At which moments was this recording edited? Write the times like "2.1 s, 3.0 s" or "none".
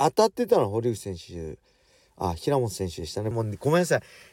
3.3 s